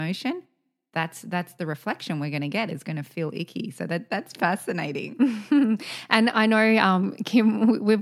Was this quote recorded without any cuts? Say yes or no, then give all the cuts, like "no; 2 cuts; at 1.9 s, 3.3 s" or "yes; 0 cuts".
yes; 0 cuts